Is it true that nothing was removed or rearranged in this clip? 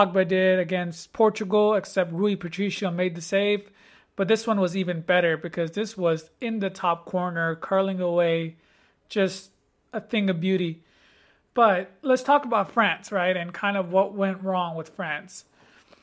yes; 0 cuts

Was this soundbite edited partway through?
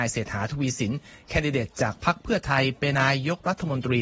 yes; 1 cut; at 2.9 s

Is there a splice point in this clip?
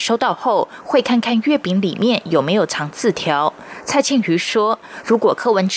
no; 0 cuts

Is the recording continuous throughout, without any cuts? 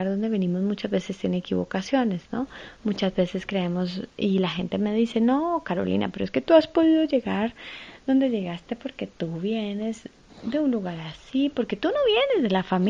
yes; 0 cuts

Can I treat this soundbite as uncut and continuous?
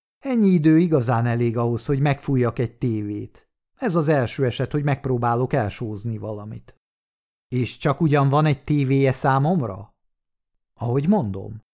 yes; 0 cuts

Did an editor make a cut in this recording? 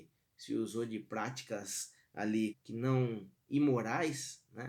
yes; 1 cut; at 2.5 s

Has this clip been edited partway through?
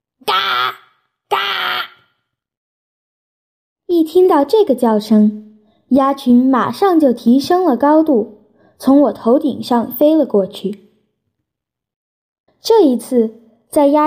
yes; 1 cut; at 12.5 s

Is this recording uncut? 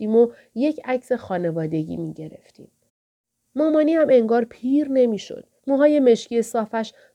no; 2 cuts; at 3.4 s, 5.6 s

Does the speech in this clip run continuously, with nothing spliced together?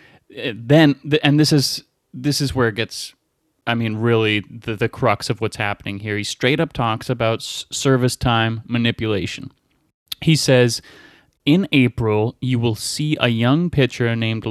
yes; 0 cuts

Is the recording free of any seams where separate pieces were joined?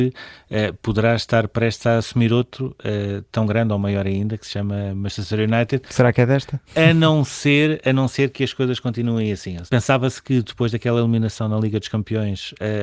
no; 1 cut; at 9.7 s

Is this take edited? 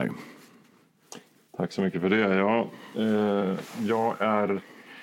no; 0 cuts

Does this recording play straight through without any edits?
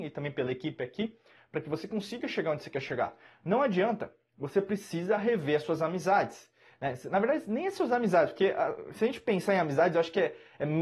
yes; 0 cuts

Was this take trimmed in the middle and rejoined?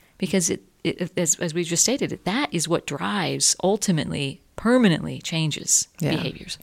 no; 0 cuts

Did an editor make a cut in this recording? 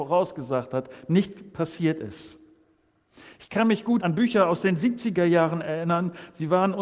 yes; 1 cut; at 4.0 s

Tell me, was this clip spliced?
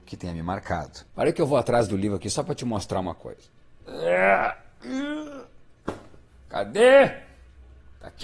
yes; 1 cut; at 1.1 s

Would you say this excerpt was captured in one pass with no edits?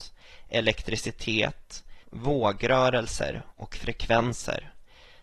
no; 1 cut; at 2.0 s

